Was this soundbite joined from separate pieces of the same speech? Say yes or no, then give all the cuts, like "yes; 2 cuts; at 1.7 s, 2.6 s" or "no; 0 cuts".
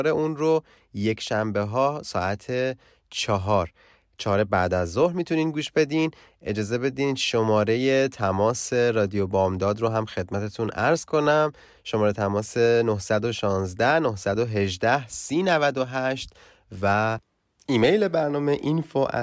no; 0 cuts